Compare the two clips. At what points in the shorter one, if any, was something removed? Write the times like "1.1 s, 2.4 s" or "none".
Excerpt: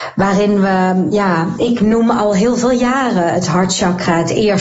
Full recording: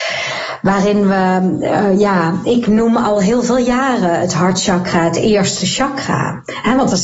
1.1 s